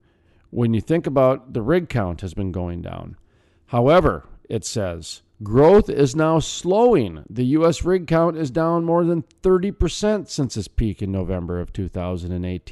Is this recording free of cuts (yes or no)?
yes